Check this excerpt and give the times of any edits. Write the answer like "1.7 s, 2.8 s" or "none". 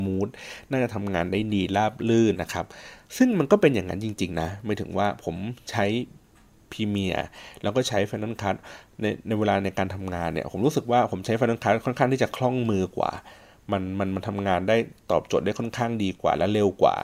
2.3 s